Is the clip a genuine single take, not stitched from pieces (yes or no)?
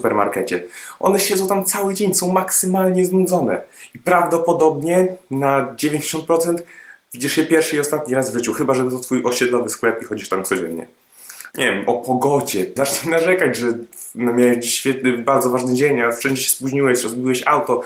no